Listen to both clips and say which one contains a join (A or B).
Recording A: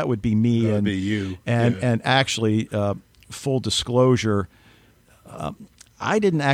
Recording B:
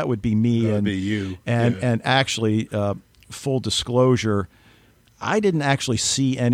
B